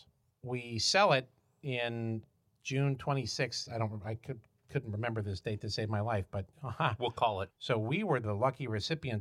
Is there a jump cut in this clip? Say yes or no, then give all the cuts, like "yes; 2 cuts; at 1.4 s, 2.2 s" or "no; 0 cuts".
yes; 1 cut; at 7.5 s